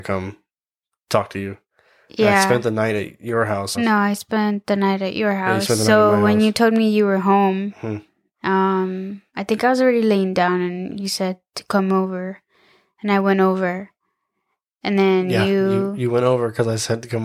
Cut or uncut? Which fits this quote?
cut